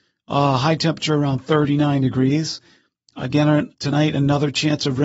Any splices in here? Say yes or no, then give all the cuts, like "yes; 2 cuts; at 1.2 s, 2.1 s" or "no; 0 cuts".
yes; 1 cut; at 3.7 s